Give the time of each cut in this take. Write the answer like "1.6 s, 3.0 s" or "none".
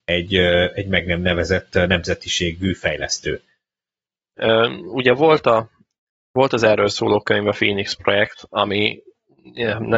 4.4 s